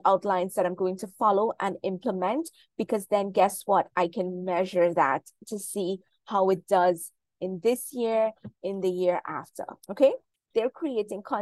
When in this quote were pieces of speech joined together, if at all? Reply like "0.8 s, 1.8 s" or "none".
10.5 s